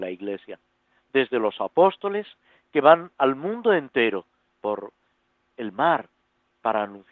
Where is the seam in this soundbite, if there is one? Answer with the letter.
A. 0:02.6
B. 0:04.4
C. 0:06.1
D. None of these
B